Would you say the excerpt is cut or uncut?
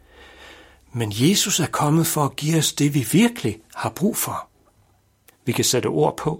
cut